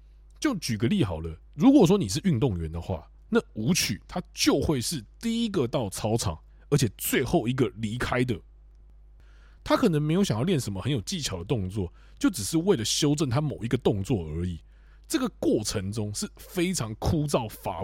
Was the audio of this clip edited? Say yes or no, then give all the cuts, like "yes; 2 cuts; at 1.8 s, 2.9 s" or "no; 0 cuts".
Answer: yes; 1 cut; at 1.4 s